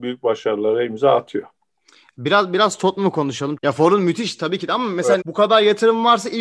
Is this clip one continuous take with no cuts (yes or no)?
no